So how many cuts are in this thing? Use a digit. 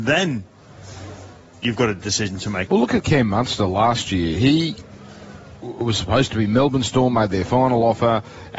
1